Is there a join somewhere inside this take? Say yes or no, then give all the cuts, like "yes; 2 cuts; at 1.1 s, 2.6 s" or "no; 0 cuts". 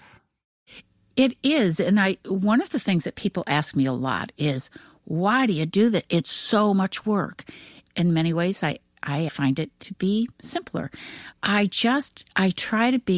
yes; 3 cuts; at 7.8 s, 9.3 s, 11.3 s